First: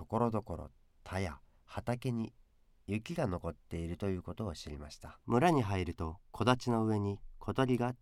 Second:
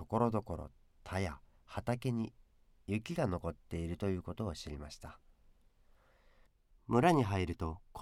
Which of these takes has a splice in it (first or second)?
first